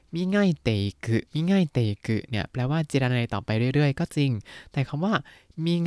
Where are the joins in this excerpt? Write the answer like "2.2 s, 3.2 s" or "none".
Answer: 1.3 s